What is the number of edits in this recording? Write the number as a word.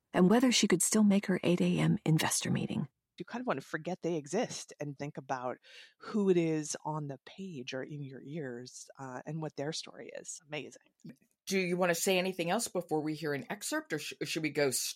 three